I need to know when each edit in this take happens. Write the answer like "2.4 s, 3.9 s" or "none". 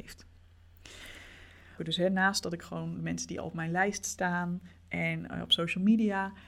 1.8 s